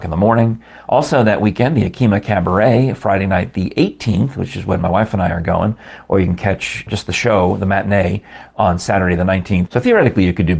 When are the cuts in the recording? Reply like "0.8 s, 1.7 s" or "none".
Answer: 6.9 s, 9.7 s